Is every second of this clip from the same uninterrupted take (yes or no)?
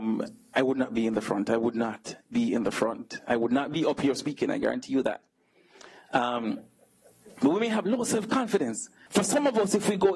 no